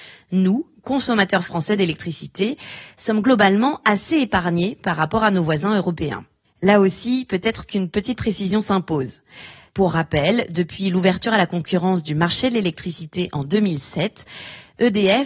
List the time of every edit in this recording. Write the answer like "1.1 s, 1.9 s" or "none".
6.4 s